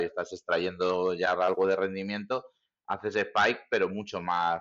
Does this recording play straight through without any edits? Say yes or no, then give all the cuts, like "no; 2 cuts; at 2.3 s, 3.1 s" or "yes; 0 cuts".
yes; 0 cuts